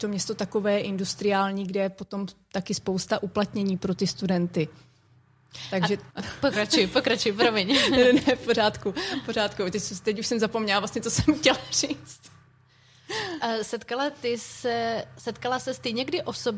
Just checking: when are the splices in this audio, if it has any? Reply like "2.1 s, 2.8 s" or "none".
6.1 s